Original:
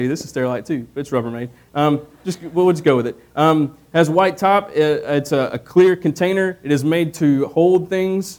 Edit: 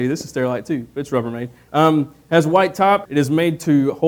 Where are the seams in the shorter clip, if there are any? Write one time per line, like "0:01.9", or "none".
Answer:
0:01.7
0:03.1